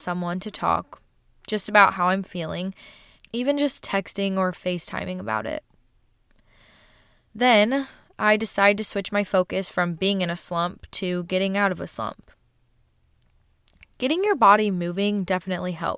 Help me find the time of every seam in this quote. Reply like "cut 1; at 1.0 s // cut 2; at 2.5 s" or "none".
cut 1; at 3.2 s